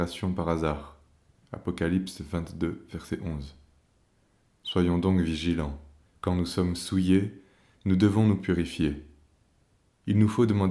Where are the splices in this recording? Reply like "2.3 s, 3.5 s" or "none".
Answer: 1.4 s, 6.1 s